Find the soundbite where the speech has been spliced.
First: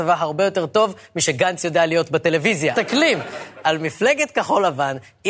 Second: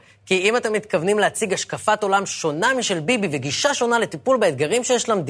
first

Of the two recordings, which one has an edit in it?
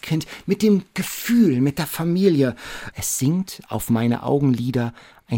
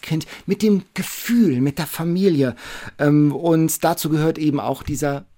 first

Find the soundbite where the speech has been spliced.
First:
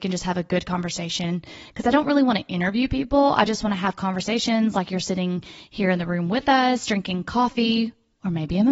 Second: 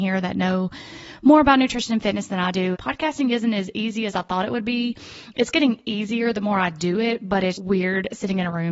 second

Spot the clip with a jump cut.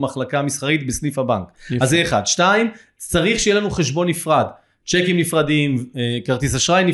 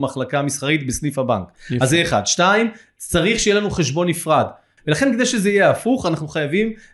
second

